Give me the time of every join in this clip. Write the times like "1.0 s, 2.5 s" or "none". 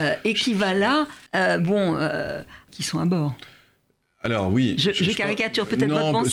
1.3 s, 2.7 s